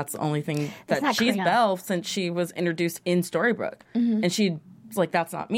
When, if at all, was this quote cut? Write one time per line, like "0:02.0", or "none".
0:01.4

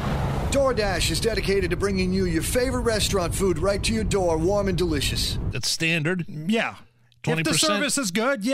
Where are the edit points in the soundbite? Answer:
0:05.5

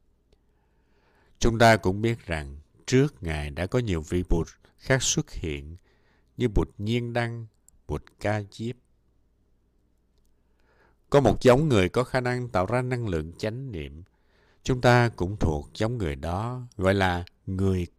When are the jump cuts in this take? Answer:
none

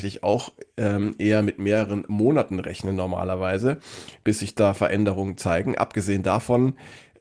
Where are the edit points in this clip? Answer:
none

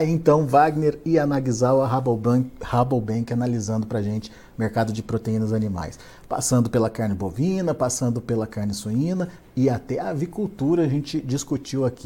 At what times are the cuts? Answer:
none

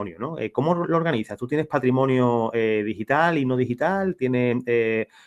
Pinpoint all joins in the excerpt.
none

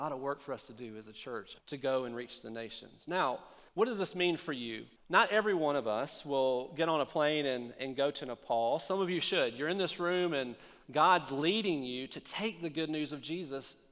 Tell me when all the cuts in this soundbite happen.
0:01.6
0:03.7
0:05.0

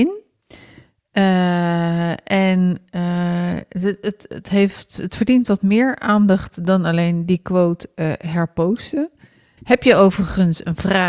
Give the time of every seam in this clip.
0:09.6

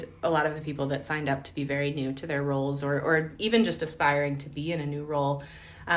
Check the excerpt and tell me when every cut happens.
none

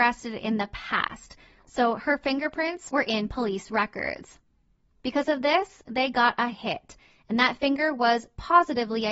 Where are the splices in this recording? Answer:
none

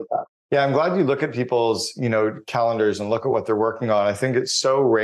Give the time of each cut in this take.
none

